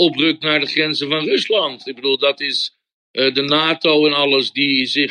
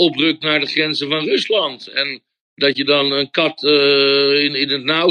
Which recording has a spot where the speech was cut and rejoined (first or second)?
first